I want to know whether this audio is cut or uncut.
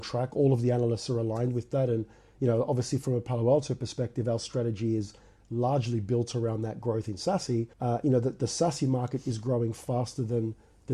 cut